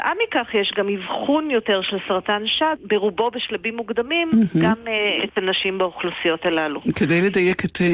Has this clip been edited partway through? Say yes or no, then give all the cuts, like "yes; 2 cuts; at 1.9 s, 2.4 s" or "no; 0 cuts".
no; 0 cuts